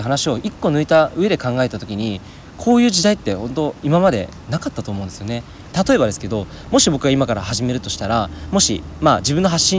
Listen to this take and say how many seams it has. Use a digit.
1